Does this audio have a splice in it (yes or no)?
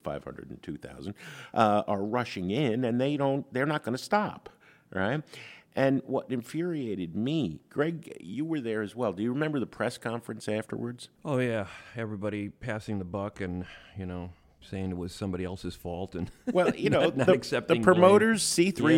no